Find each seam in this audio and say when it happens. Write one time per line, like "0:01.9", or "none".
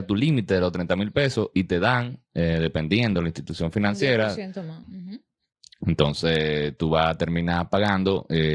0:04.8